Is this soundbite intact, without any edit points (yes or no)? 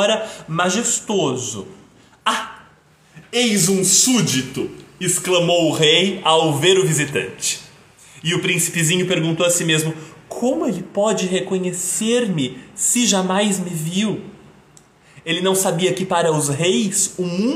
yes